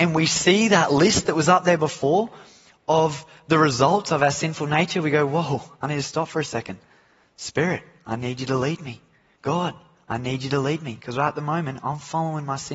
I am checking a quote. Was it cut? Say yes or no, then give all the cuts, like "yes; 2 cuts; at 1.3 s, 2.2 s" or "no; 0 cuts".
no; 0 cuts